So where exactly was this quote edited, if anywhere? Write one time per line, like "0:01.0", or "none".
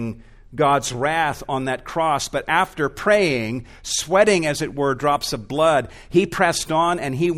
none